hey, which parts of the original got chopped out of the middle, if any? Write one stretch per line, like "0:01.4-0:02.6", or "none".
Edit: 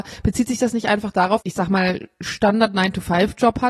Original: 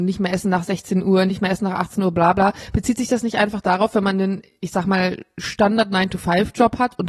0:03.9-0:04.6